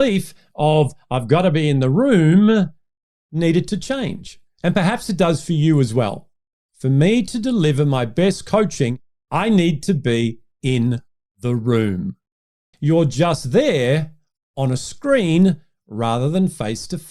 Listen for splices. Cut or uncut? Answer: cut